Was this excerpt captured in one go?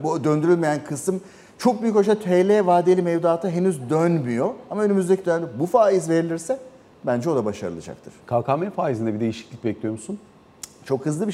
no; 1 cut; at 8.2 s

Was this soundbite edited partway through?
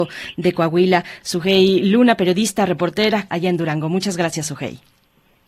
yes; 2 cuts; at 1.2 s, 3.3 s

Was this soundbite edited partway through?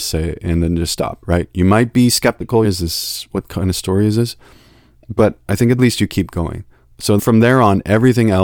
yes; 3 cuts; at 2.6 s, 5.8 s, 7.2 s

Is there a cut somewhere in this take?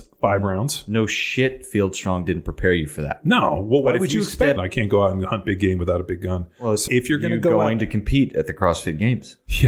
yes; 2 cuts; at 4.6 s, 6.9 s

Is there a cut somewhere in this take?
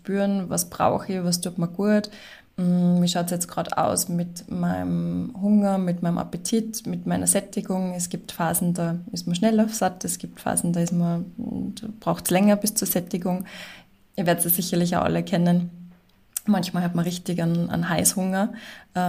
no; 0 cuts

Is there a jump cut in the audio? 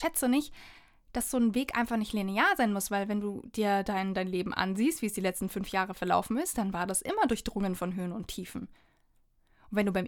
no; 0 cuts

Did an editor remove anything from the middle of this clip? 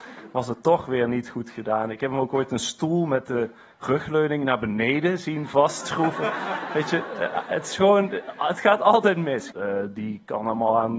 yes; 1 cut; at 9.5 s

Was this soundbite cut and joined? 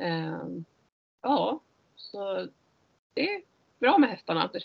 no; 0 cuts

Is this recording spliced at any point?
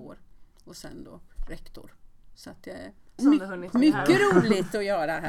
yes; 1 cut; at 3.2 s

